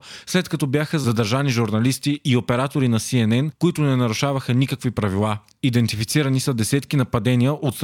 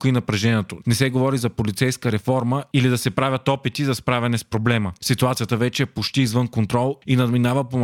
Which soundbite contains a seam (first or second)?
second